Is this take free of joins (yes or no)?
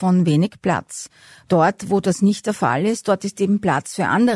yes